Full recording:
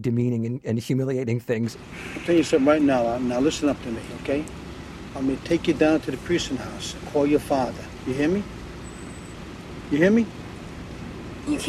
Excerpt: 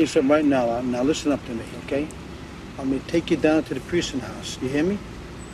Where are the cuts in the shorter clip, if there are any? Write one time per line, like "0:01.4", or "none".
0:04.6